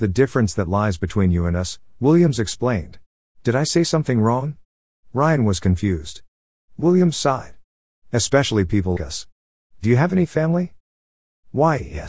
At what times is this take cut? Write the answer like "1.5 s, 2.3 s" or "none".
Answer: 3.3 s, 6.6 s, 9.0 s